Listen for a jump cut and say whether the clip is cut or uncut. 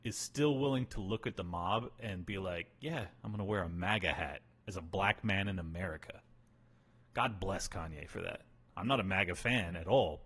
uncut